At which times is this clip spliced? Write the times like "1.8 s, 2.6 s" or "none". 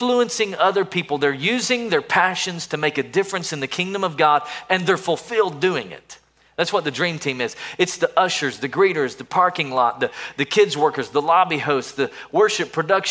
none